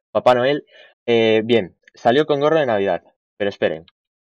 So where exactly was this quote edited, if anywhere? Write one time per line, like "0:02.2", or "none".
0:00.9